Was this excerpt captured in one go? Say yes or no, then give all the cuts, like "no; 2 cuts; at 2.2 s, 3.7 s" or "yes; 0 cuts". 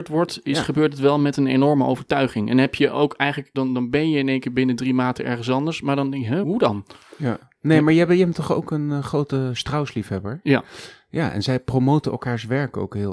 no; 2 cuts; at 3.5 s, 6.4 s